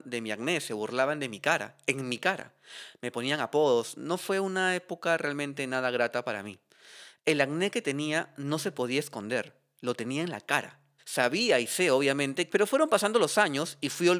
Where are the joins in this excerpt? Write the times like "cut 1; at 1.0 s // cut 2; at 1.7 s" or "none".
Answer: cut 1; at 11.0 s // cut 2; at 12.5 s